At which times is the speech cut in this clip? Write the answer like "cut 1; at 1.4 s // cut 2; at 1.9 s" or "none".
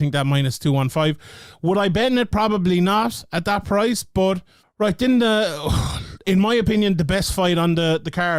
cut 1; at 4.6 s